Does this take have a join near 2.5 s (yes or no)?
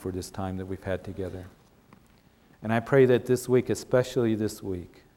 yes